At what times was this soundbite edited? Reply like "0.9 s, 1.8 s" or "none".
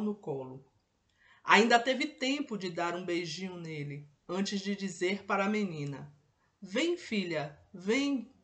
none